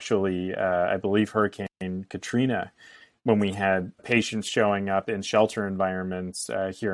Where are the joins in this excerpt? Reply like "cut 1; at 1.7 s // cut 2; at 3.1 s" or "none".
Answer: cut 1; at 4.0 s